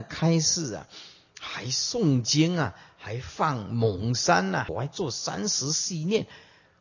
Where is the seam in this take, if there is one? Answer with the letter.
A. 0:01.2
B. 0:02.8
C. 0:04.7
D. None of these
C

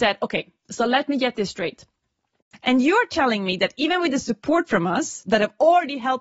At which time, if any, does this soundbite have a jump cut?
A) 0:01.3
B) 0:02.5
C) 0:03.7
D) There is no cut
B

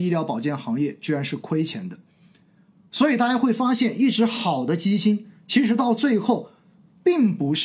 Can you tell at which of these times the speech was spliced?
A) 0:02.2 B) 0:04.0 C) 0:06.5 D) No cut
D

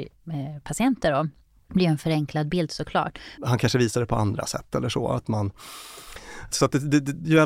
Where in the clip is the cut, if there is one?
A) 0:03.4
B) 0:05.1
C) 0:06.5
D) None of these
A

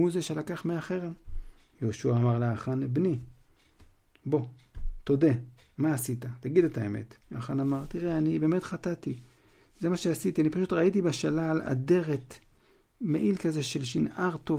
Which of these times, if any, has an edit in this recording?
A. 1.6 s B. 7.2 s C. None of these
B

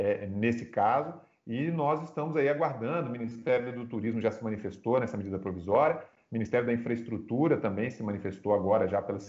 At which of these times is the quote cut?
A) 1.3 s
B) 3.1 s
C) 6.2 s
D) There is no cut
D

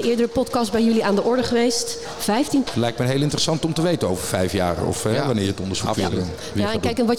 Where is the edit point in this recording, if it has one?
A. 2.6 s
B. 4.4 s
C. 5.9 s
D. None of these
A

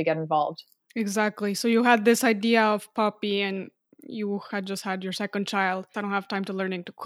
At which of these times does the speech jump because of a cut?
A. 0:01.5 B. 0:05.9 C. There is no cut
B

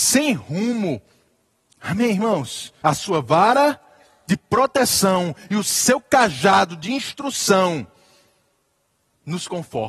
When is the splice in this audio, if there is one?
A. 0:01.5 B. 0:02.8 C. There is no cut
B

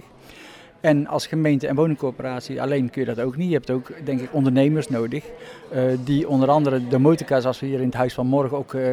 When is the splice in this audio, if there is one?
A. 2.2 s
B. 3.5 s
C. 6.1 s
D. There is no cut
D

